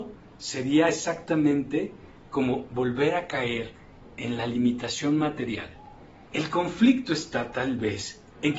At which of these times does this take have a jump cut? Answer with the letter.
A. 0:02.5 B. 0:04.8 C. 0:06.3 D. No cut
C